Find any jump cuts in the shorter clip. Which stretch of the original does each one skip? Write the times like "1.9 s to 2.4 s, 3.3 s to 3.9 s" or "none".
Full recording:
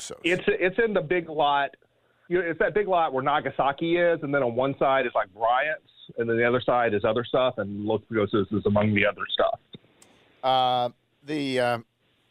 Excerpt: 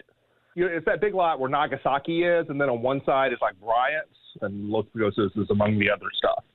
6.1 s to 7.5 s